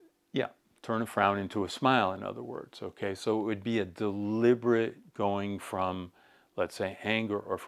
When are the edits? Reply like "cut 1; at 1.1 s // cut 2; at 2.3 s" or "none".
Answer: none